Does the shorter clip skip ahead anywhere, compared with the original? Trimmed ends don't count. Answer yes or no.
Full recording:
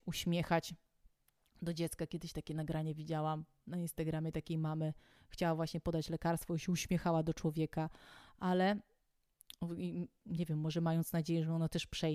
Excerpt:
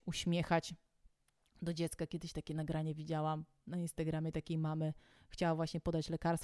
no